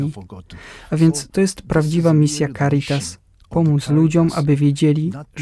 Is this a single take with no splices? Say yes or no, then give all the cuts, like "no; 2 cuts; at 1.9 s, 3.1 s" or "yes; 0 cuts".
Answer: yes; 0 cuts